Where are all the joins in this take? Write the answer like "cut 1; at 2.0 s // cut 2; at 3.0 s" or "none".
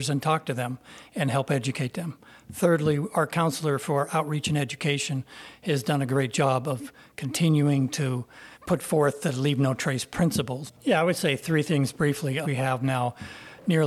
cut 1; at 8.5 s // cut 2; at 10.7 s // cut 3; at 12.4 s